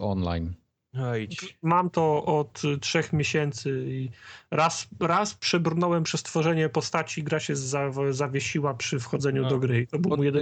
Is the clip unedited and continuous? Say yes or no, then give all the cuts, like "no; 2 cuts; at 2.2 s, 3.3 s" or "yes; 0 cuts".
yes; 0 cuts